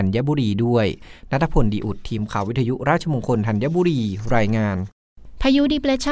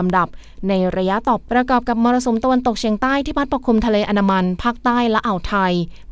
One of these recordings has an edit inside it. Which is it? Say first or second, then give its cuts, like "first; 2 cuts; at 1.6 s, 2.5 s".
second; 1 cut; at 1.4 s